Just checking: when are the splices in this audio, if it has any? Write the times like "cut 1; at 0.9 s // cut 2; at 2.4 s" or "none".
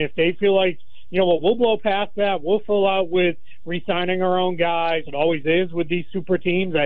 cut 1; at 5.1 s